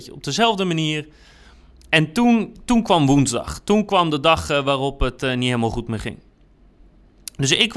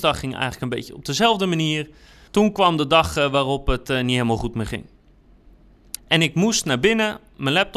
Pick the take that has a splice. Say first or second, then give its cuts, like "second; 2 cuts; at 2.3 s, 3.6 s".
second; 2 cuts; at 2.3 s, 6.0 s